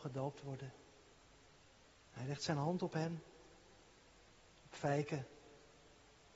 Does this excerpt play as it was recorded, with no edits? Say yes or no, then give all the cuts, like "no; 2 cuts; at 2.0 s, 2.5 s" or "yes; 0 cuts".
yes; 0 cuts